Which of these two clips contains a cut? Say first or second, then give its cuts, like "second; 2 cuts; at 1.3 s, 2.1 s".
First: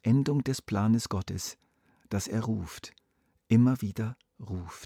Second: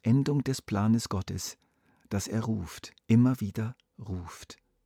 second; 1 cut; at 3.0 s